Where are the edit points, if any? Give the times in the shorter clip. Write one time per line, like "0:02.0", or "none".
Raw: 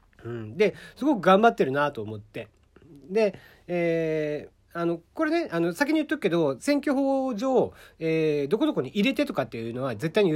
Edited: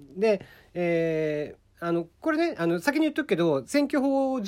none